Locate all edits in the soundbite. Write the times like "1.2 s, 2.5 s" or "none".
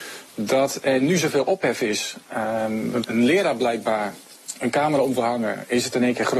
3.0 s